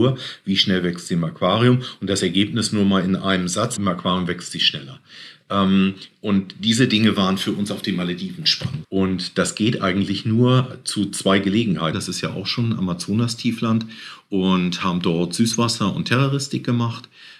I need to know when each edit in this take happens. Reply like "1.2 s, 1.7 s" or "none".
3.8 s, 8.8 s, 11.9 s